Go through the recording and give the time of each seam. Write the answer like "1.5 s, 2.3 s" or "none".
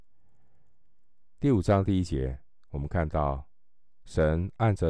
none

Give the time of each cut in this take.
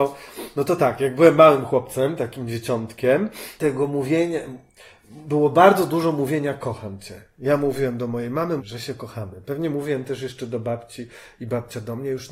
3.6 s, 8.6 s

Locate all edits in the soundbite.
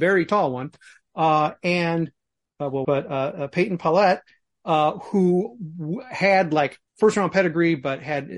2.8 s, 6.9 s

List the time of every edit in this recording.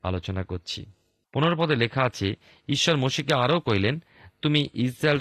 none

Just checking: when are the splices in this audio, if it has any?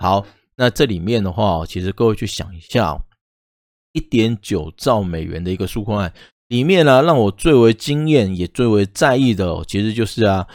none

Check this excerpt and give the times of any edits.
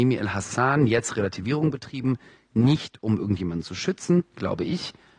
none

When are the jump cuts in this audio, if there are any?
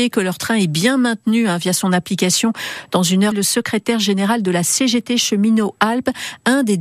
3.3 s

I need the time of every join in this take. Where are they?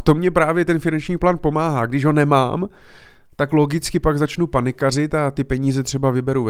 none

